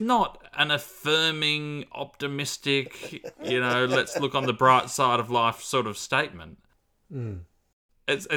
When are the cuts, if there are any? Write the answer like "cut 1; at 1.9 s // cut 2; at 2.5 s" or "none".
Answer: none